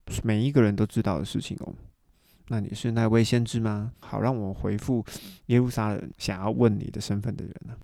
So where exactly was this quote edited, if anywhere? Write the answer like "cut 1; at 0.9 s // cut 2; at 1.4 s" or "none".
cut 1; at 2.1 s // cut 2; at 3.9 s